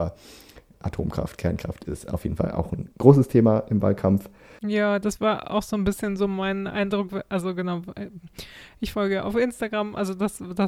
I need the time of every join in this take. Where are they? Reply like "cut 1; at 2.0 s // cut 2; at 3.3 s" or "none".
cut 1; at 4.6 s